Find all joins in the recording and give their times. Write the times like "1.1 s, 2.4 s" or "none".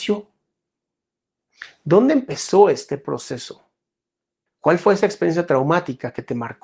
4.5 s